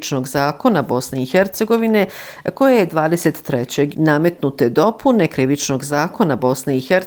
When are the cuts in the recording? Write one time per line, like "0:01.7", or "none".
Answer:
0:03.9